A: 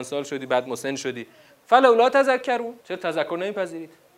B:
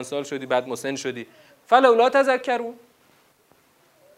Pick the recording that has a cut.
A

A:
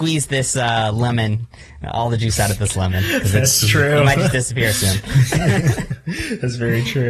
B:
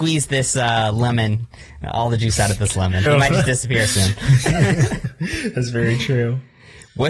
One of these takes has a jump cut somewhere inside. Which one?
B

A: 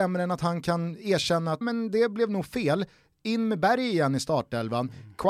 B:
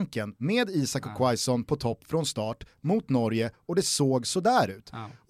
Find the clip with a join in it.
A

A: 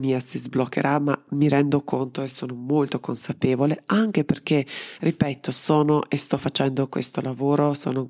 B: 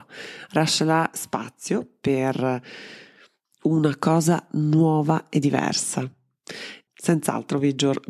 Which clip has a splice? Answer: B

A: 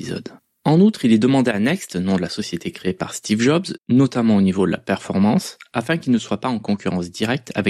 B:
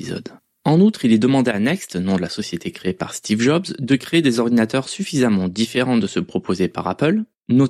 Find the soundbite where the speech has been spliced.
A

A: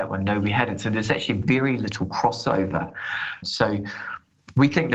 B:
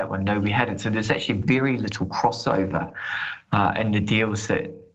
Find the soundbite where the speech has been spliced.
A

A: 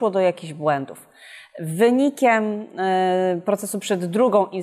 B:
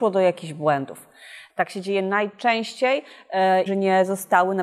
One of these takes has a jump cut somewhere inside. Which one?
B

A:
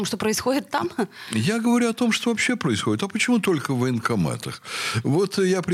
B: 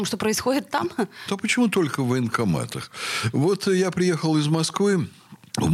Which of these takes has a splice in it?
B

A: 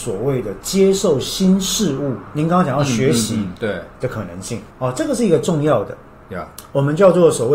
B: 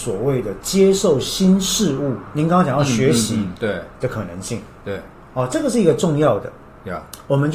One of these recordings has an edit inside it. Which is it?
A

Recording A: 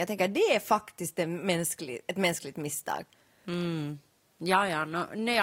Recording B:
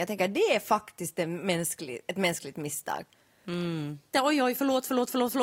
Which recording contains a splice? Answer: B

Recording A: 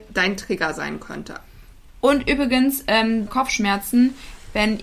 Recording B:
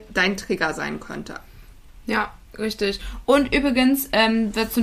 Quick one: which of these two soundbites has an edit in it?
A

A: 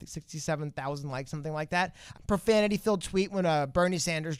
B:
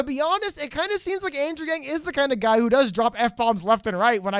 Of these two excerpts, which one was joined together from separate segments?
A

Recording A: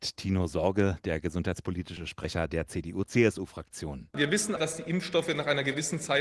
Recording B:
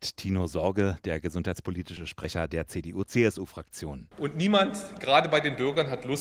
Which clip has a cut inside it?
B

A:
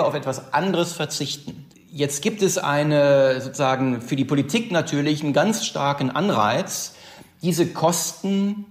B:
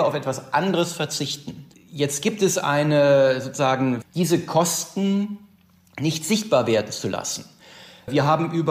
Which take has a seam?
B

